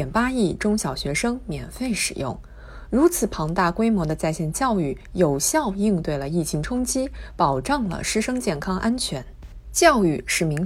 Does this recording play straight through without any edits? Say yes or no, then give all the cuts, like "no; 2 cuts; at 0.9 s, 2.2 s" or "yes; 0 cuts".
yes; 0 cuts